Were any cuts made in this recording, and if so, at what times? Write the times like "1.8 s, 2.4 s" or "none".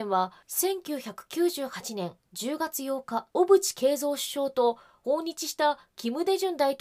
3.3 s